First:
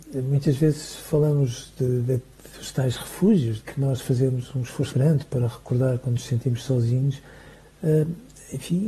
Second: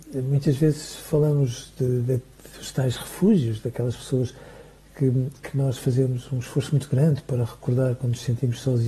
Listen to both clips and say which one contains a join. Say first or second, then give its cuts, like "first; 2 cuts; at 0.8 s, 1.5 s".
first; 3 cuts; at 3.6 s, 4.9 s, 7.6 s